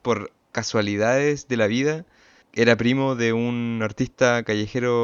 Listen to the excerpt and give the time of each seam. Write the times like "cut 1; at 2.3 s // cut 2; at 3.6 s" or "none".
cut 1; at 2.4 s